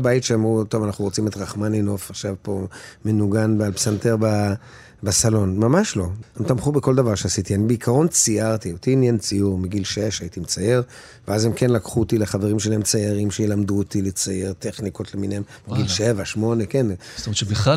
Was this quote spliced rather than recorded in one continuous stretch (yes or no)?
yes